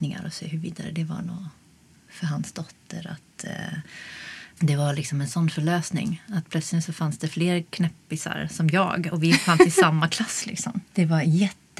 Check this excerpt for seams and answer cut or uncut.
cut